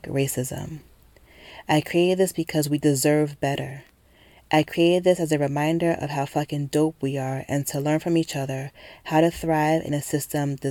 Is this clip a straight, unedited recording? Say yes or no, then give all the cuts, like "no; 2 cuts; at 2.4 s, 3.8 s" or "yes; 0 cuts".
yes; 0 cuts